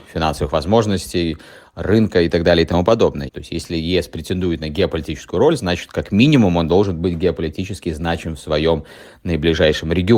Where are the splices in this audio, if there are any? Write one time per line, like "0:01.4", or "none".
0:03.3